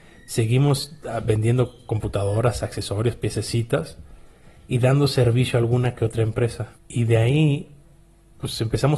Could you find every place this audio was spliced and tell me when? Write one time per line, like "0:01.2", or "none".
0:06.7